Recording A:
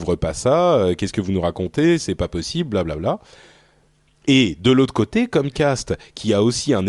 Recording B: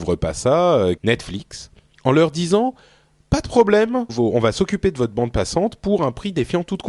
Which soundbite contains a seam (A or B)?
B